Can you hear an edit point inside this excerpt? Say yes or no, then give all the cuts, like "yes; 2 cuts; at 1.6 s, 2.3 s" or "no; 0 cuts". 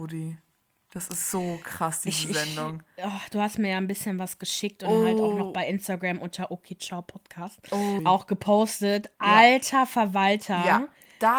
yes; 1 cut; at 8.0 s